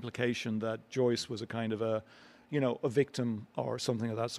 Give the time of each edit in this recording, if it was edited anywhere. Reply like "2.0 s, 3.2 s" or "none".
none